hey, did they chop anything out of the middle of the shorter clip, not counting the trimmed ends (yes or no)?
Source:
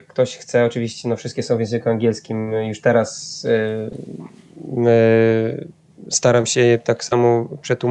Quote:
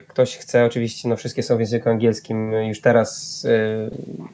no